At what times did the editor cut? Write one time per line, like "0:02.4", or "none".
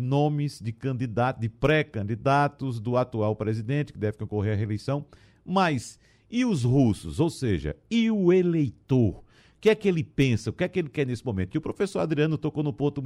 none